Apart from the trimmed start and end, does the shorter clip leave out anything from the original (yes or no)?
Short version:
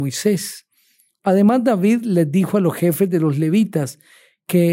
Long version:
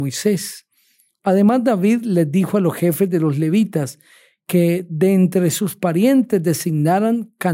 no